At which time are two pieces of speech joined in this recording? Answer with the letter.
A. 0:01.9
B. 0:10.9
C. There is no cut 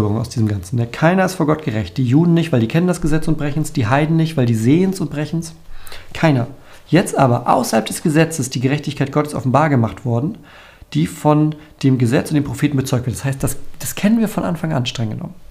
C